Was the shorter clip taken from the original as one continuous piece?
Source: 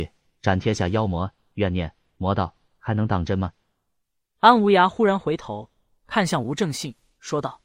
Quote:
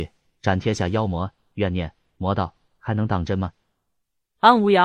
yes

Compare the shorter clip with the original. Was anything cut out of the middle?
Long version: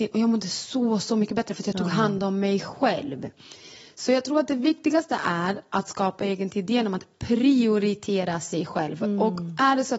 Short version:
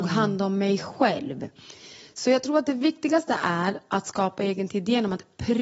no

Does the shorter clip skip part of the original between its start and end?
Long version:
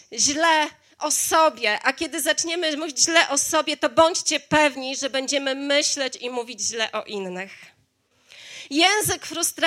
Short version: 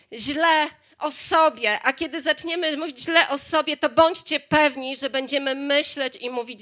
no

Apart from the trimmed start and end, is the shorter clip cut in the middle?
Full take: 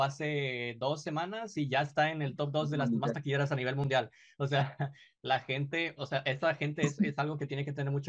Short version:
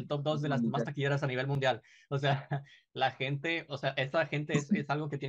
no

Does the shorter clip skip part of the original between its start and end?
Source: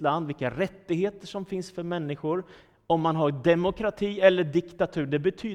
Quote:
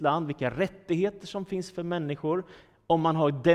no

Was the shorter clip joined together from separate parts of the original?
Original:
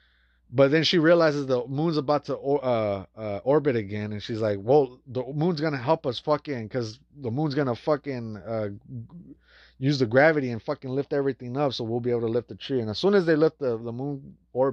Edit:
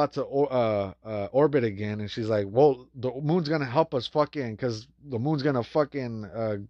no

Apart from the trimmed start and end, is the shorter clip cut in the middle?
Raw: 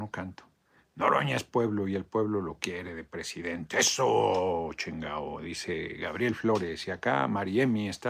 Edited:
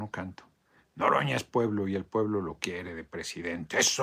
no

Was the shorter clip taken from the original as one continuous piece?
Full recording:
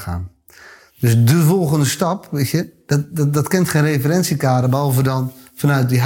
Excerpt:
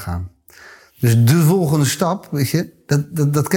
yes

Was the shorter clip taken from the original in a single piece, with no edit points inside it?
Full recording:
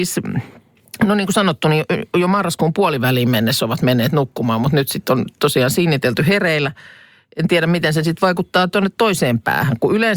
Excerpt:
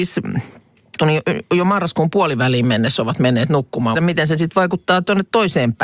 no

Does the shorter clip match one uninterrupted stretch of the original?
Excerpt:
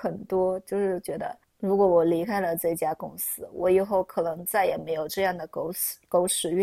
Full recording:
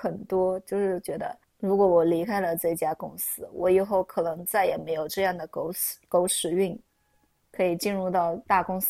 yes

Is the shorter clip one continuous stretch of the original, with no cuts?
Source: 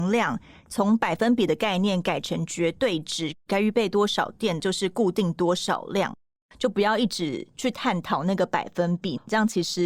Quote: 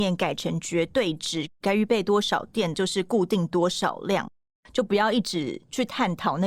yes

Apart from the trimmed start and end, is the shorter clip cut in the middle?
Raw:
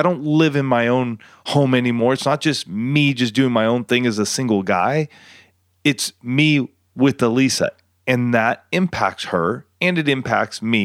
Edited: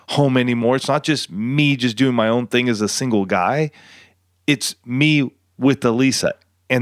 no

